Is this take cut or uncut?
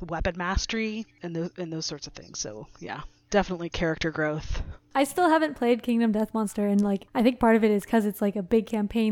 uncut